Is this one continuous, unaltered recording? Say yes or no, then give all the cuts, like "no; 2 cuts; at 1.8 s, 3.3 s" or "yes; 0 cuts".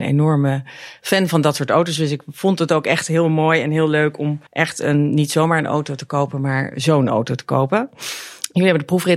no; 1 cut; at 4.5 s